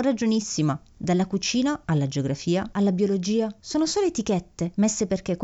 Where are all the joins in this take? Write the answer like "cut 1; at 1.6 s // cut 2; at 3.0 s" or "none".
cut 1; at 2.7 s